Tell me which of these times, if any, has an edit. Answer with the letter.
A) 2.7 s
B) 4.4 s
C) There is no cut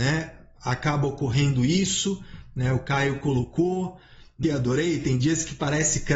B